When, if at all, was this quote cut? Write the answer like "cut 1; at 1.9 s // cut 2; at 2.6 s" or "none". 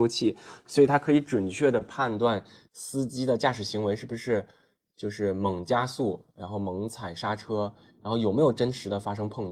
none